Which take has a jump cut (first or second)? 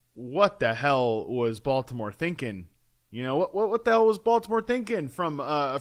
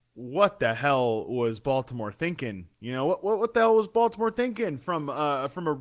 second